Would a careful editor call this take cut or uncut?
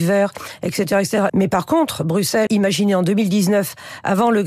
cut